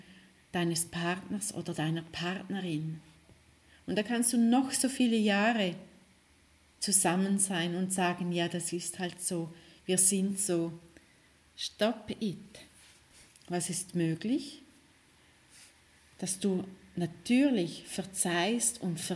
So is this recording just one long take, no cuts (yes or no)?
yes